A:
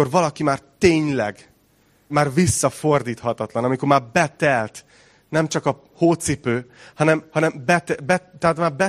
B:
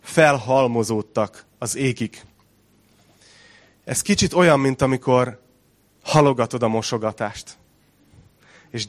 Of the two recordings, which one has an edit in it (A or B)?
A